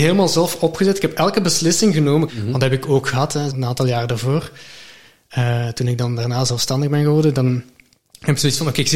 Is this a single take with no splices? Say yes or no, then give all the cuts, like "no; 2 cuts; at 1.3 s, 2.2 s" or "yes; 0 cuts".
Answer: no; 2 cuts; at 2.3 s, 3.5 s